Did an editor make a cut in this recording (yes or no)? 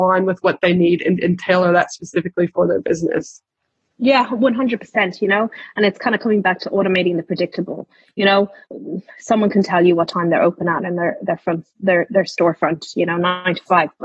no